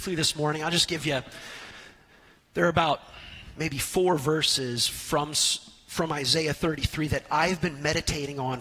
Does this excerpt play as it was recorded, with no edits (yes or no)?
yes